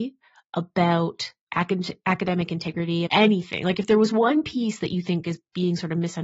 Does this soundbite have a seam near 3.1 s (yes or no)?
yes